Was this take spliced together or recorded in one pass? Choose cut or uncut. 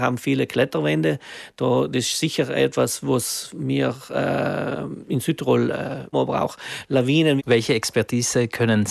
cut